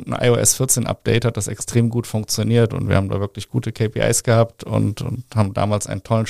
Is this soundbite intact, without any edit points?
no; 1 cut; at 2.7 s

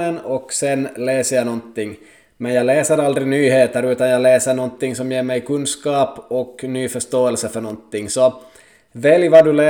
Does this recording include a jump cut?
no; 0 cuts

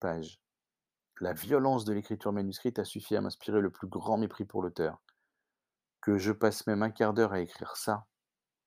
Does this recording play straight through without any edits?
yes; 0 cuts

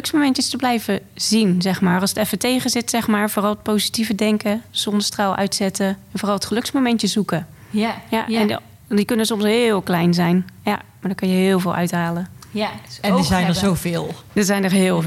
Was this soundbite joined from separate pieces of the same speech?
no; 0 cuts

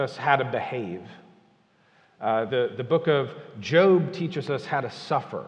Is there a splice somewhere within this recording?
yes; 1 cut; at 2.5 s

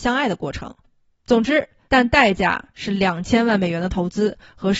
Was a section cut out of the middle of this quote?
yes; 1 cut; at 1.9 s

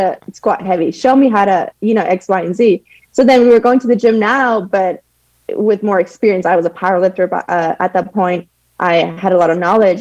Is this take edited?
no; 0 cuts

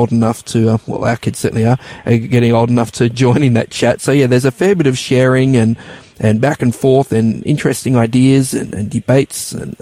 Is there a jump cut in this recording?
no; 0 cuts

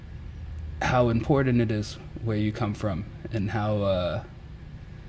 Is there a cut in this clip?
no; 0 cuts

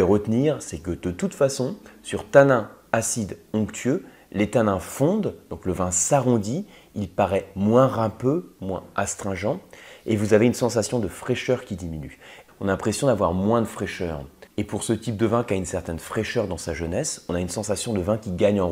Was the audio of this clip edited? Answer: yes; 2 cuts; at 12.5 s, 14.5 s

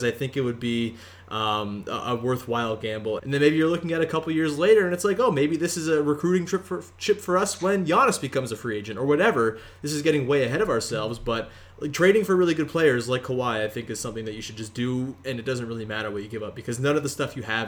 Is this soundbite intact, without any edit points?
no; 1 cut; at 3.2 s

